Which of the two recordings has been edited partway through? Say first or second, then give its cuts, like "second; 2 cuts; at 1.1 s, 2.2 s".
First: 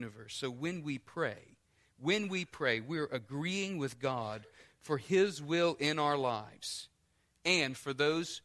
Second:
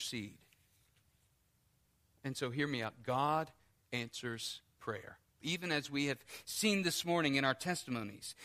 second; 1 cut; at 5.4 s